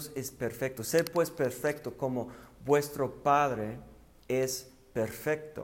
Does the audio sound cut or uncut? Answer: uncut